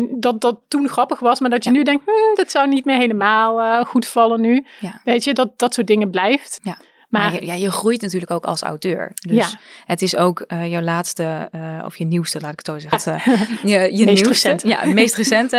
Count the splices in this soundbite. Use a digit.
2